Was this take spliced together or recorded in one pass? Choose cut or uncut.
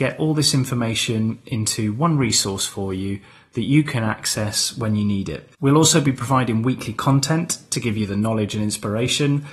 cut